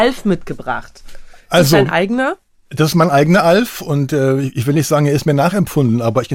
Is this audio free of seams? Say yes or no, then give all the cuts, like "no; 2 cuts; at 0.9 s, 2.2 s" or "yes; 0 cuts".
yes; 0 cuts